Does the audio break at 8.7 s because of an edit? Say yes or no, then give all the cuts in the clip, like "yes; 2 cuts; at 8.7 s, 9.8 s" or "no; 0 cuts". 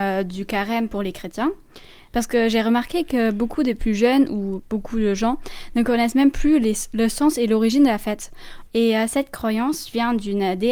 yes; 2 cuts; at 2.1 s, 8.7 s